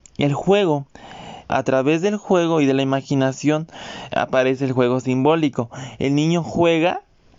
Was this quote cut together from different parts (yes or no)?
yes